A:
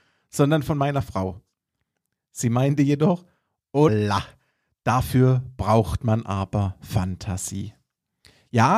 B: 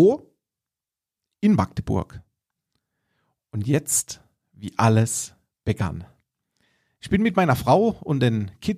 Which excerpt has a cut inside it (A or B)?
A